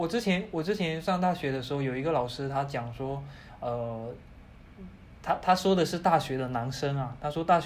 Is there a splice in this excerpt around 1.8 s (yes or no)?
no